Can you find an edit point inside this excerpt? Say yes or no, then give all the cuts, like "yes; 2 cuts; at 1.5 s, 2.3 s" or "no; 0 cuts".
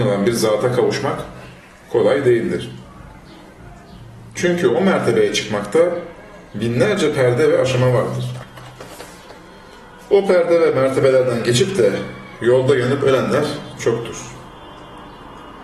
no; 0 cuts